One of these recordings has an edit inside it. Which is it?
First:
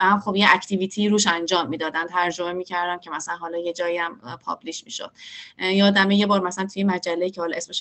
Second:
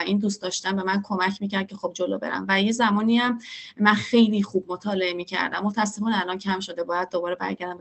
second; 1 cut; at 1.9 s

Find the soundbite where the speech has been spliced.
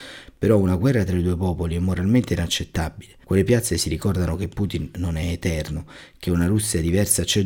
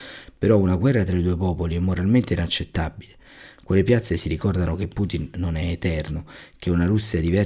first; 1 cut; at 3.2 s

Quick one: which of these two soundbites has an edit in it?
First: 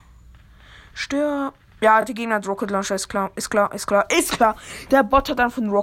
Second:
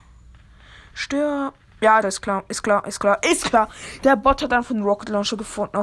second; 1 cut; at 2.0 s

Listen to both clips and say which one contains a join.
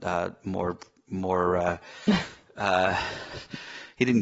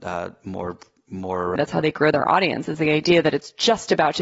second; 1 cut; at 1.6 s

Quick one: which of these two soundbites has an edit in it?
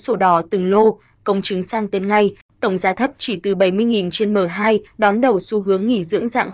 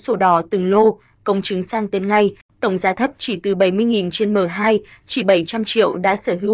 first; 1 cut; at 4.9 s

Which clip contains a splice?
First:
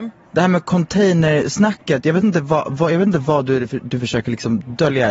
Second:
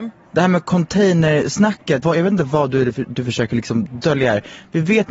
second; 1 cut; at 2.0 s

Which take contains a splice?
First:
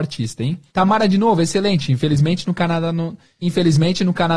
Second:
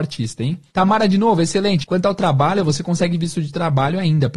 second; 1 cut; at 1.8 s

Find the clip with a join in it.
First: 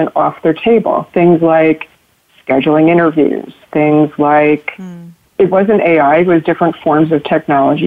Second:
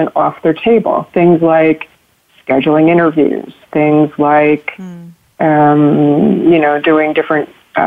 first; 1 cut; at 5.3 s

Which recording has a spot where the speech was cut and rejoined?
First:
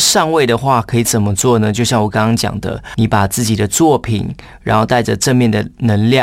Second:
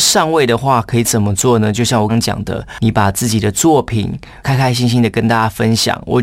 second; 2 cuts; at 2.1 s, 4.4 s

